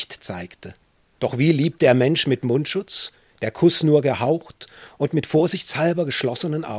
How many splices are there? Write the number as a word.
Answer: zero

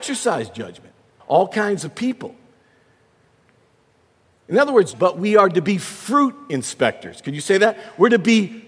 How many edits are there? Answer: two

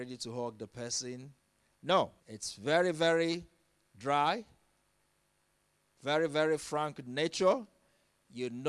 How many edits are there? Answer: one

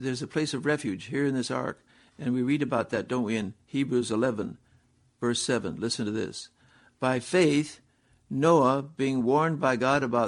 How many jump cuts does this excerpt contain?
zero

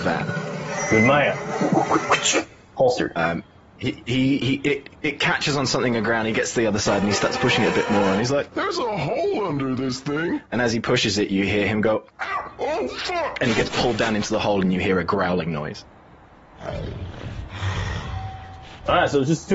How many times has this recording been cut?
one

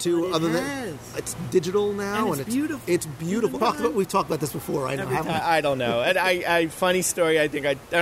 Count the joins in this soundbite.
two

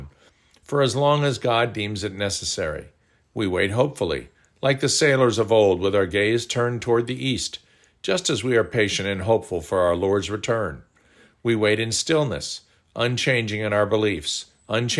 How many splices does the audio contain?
zero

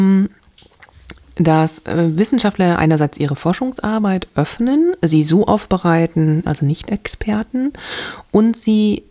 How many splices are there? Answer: one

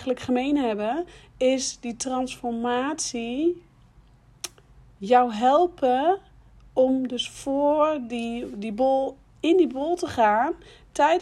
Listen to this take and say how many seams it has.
zero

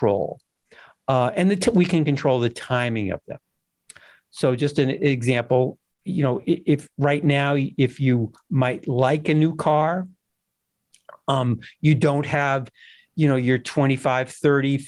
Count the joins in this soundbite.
zero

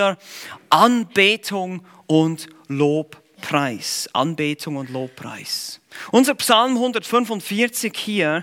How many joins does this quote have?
zero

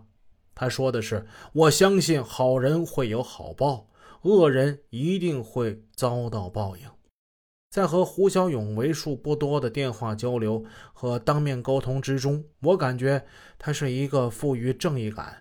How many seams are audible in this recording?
one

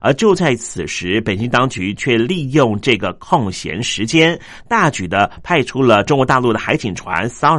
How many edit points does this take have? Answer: zero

